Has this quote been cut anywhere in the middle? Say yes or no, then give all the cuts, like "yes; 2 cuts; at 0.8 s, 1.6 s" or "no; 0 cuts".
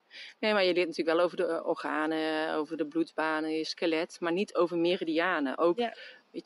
no; 0 cuts